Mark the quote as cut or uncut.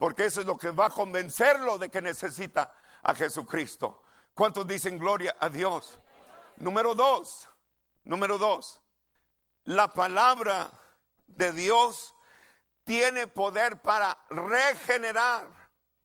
uncut